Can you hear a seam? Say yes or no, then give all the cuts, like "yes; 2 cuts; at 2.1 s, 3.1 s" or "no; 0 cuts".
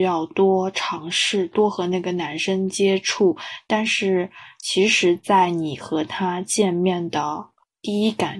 no; 0 cuts